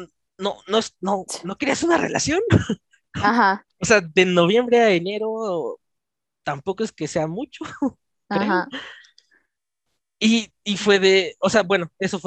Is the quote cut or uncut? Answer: uncut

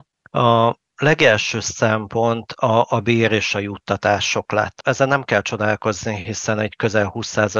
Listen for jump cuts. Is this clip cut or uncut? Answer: uncut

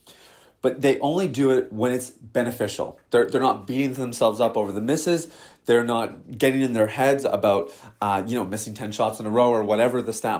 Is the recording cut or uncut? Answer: uncut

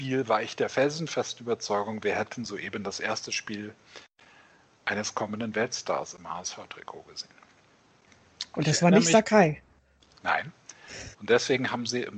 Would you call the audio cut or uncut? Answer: cut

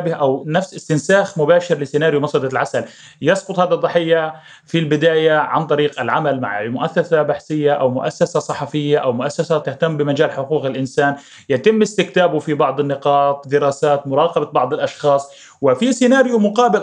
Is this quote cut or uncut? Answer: cut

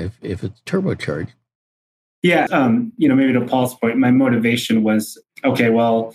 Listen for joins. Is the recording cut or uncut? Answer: cut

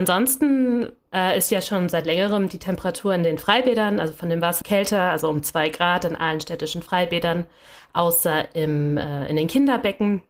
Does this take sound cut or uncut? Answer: cut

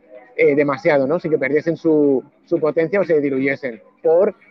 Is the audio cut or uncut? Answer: uncut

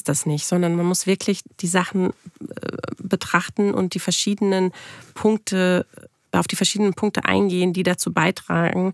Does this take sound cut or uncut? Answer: uncut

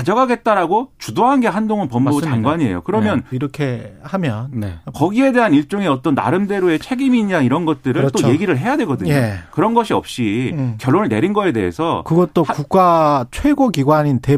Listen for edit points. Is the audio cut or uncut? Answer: cut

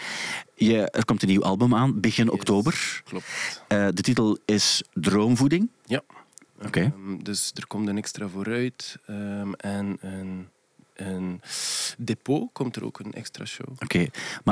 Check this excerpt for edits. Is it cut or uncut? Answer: cut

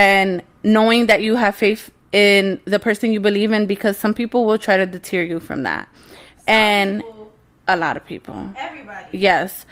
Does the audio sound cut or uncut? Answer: uncut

